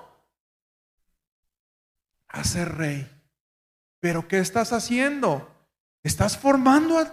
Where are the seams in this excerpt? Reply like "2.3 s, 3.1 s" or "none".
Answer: 3.9 s